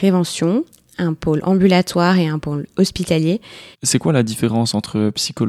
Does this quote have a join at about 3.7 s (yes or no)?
yes